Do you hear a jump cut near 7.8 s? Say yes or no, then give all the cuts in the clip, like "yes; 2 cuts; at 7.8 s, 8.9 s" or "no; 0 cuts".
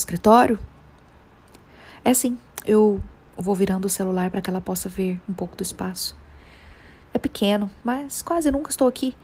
yes; 1 cut; at 7.8 s